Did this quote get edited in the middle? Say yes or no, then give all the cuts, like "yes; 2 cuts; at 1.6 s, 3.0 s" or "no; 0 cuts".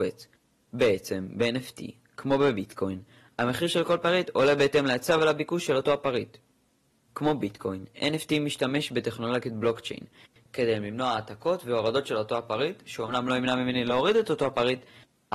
yes; 1 cut; at 10.4 s